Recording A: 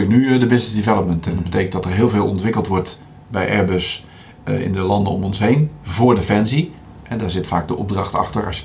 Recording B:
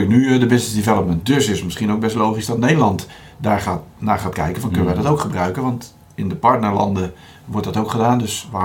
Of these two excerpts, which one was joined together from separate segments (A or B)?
B